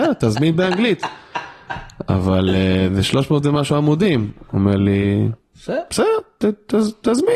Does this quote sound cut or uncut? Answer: uncut